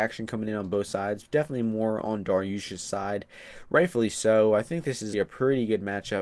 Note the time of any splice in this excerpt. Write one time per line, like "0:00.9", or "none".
0:05.1